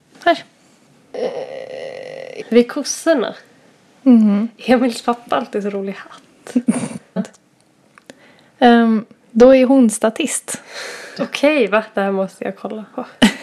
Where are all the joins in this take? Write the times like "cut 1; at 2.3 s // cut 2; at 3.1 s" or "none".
cut 1; at 2.4 s // cut 2; at 7.2 s // cut 3; at 11.2 s

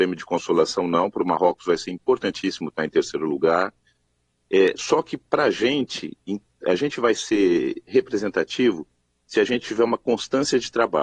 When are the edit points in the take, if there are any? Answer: none

